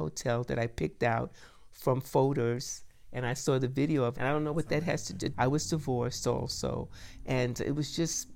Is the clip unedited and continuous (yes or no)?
no